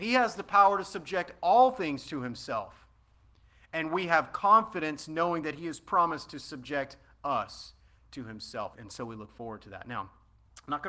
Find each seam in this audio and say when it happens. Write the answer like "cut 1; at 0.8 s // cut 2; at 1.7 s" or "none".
cut 1; at 8.7 s